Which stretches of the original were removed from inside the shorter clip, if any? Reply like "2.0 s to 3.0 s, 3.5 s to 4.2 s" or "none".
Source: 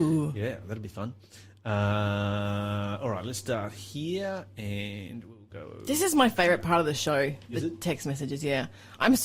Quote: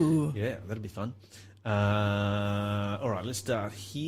none